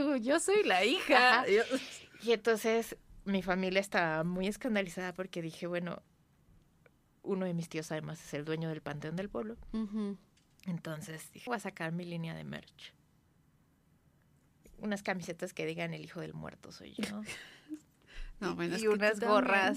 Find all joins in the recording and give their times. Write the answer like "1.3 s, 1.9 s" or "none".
11.5 s